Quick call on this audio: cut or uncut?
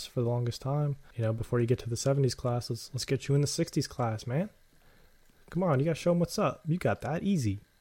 uncut